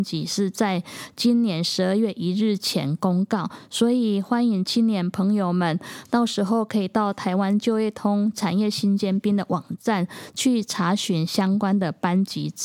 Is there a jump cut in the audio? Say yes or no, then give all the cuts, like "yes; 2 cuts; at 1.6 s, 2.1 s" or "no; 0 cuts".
no; 0 cuts